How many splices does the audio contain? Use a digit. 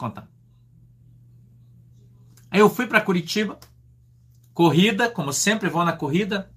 0